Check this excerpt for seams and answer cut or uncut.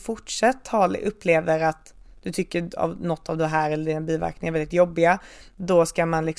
uncut